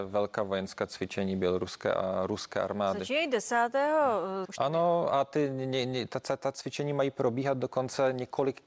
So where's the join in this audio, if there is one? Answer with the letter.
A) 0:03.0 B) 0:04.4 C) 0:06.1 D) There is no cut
B